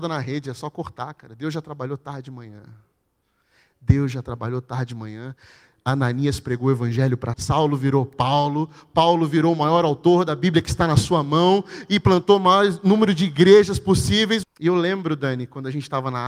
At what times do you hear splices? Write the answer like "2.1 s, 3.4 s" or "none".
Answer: 7.3 s, 14.4 s